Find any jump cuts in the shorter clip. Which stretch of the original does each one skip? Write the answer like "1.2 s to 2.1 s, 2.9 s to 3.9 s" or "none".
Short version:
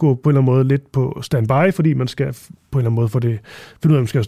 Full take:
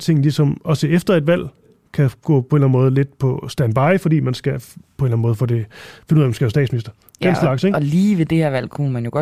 none